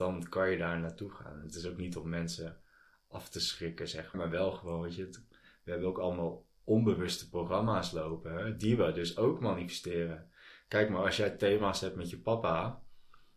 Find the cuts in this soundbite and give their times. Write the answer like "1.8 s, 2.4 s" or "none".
4.1 s